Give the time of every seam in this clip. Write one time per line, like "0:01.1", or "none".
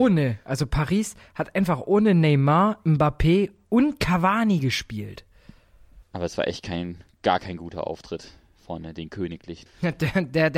0:06.0
0:09.7